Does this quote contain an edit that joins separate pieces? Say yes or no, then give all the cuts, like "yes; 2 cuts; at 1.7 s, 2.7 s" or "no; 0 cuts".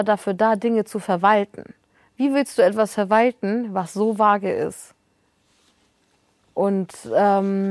no; 0 cuts